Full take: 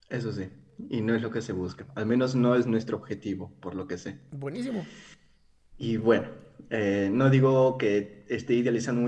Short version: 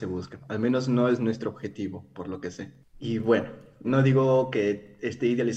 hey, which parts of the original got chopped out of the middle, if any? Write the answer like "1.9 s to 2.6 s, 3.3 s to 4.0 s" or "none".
4.3 s to 5.6 s, 6.6 s to 7.1 s